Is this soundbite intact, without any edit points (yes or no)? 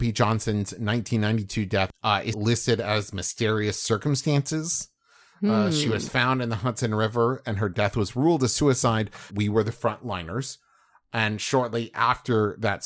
no